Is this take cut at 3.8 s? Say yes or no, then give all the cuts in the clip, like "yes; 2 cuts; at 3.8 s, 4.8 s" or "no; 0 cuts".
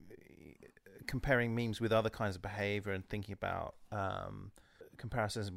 no; 0 cuts